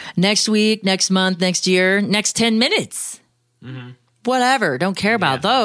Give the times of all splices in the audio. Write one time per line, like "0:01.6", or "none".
none

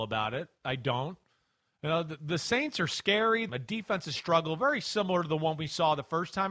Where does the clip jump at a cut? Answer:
0:03.5

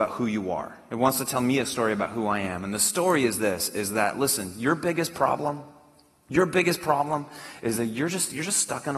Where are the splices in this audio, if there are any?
none

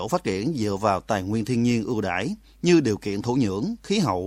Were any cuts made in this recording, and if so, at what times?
none

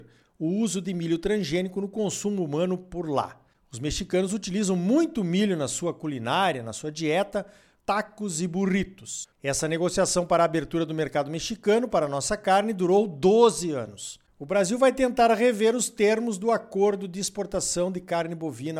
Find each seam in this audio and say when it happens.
0:07.8
0:09.3

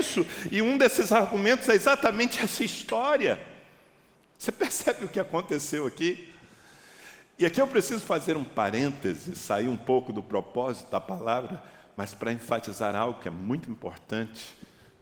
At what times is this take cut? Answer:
0:04.2

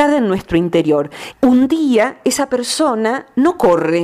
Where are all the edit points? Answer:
0:01.3

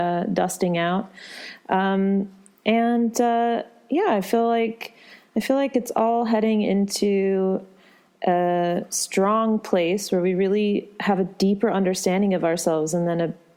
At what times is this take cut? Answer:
none

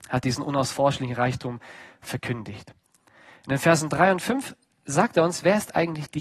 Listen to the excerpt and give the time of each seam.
none

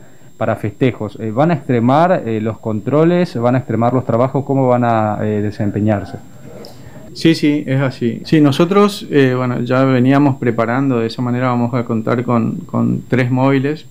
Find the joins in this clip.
0:07.1
0:08.2

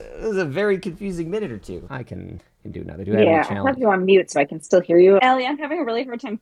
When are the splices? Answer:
0:01.9
0:05.2

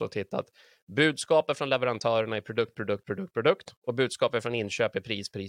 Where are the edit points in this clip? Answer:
0:03.8

